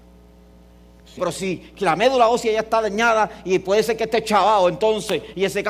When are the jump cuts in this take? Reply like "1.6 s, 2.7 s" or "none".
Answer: 1.2 s